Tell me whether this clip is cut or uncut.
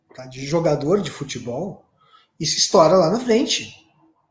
uncut